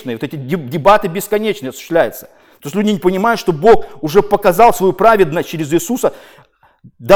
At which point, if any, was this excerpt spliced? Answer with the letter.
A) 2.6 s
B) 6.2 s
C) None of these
C